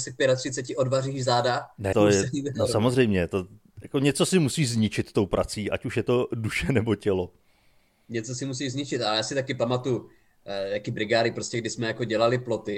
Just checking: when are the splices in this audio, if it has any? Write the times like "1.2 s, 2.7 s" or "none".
1.9 s